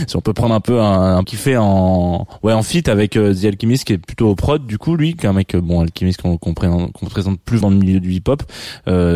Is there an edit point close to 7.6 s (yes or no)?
yes